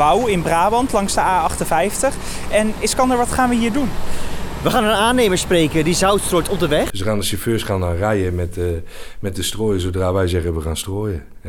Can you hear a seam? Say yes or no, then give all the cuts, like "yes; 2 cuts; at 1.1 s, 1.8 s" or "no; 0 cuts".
yes; 1 cut; at 6.9 s